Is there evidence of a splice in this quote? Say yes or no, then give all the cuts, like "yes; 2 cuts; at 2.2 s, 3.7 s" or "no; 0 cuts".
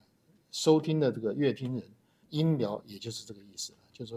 yes; 1 cut; at 2.2 s